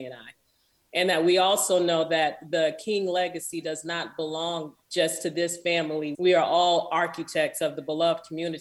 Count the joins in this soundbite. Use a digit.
2